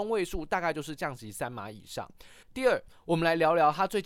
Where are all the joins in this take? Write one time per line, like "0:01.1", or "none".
0:02.4